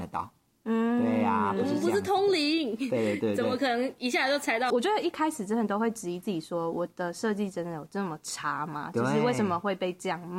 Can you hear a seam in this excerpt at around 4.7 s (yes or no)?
yes